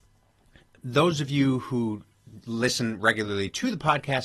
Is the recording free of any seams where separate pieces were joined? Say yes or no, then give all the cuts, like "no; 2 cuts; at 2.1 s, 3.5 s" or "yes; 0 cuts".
yes; 0 cuts